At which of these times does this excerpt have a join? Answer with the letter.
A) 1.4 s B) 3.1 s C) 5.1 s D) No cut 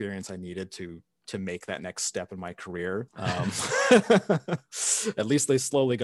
B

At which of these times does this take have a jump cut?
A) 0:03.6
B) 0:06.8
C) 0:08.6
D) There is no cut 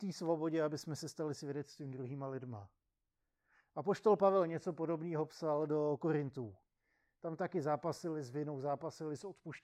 D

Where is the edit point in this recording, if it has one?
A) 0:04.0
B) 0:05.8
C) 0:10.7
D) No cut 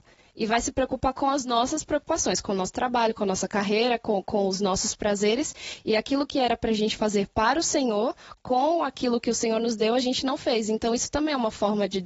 D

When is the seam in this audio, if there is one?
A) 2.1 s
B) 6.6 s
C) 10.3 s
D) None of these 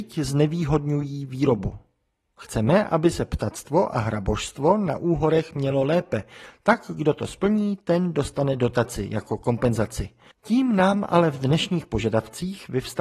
C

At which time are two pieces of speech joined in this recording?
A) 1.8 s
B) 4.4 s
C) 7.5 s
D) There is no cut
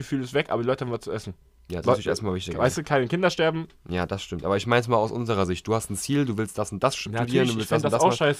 A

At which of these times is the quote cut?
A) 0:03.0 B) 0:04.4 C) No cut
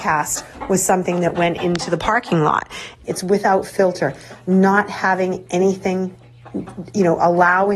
A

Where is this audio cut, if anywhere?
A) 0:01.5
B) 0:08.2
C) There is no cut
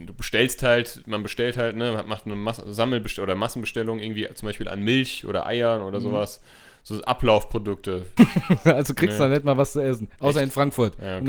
B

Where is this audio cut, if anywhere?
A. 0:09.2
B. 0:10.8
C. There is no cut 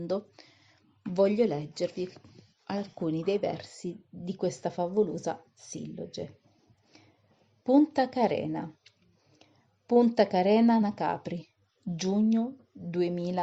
C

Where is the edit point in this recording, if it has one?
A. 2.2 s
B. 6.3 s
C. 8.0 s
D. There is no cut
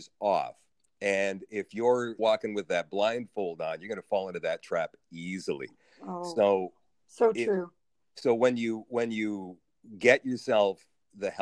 A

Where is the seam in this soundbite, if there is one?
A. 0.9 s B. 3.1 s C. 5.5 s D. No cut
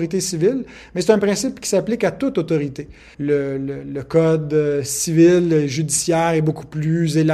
B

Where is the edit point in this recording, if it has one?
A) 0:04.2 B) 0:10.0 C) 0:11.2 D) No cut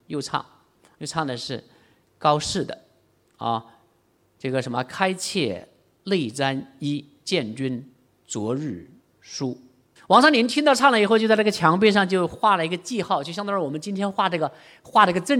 B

